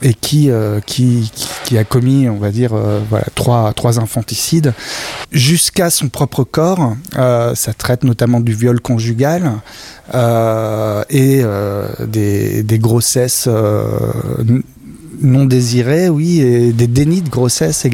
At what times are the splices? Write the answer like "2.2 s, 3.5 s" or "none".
5.2 s